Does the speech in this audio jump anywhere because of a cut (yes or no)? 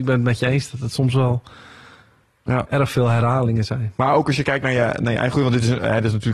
no